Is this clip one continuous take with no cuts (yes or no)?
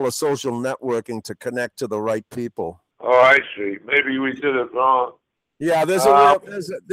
no